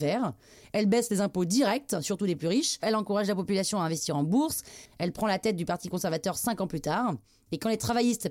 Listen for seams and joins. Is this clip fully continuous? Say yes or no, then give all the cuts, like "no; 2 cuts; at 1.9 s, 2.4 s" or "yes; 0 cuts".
no; 2 cuts; at 2.8 s, 4.9 s